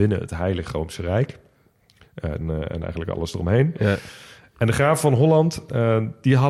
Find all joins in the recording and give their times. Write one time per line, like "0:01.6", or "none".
0:02.4